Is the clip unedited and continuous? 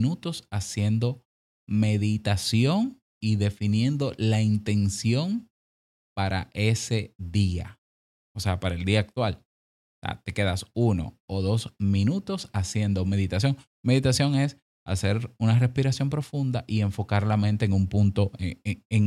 yes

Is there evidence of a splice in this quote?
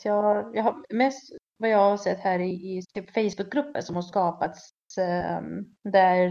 yes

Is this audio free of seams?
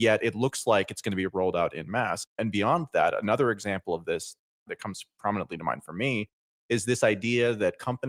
yes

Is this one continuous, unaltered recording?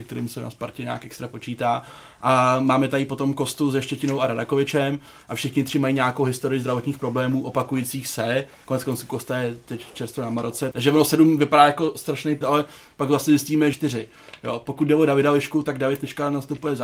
no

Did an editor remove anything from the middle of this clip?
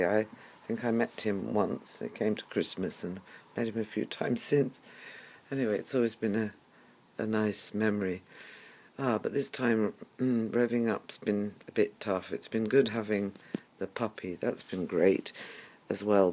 no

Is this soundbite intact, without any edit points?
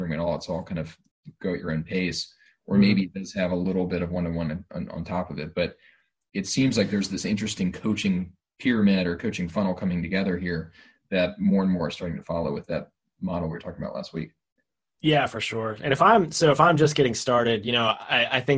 yes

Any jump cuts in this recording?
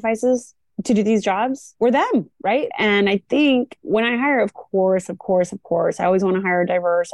yes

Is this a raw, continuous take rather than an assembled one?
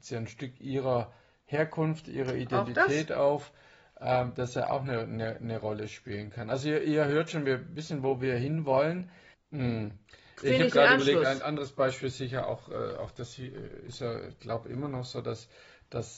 no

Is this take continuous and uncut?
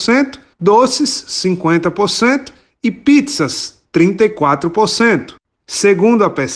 no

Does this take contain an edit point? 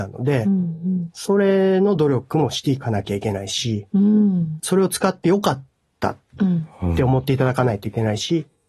yes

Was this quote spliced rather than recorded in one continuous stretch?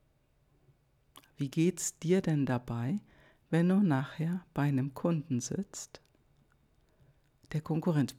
no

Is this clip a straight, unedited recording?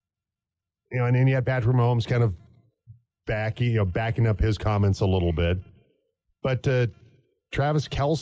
yes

